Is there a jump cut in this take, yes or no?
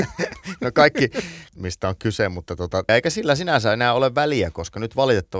yes